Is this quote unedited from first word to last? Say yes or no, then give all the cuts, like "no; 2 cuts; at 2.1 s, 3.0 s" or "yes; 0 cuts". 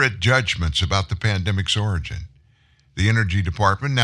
yes; 0 cuts